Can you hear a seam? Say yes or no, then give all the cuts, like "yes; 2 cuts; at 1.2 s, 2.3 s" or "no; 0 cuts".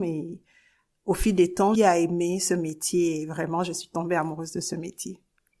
yes; 1 cut; at 1.7 s